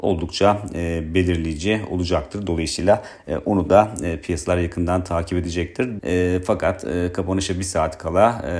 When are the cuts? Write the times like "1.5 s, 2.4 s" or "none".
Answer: 6.0 s